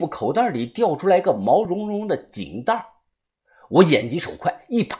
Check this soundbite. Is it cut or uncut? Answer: uncut